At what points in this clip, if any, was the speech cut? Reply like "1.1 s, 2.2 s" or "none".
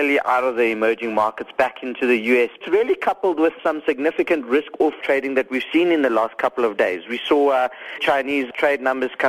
none